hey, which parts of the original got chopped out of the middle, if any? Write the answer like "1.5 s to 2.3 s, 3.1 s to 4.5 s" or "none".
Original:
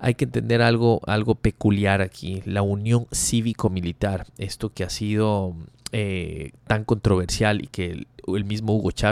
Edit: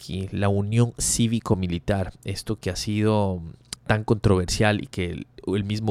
5.9 s to 6.6 s